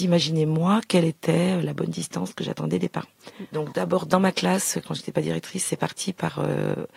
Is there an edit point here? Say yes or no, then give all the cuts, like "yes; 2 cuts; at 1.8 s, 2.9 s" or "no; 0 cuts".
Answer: yes; 1 cut; at 3.5 s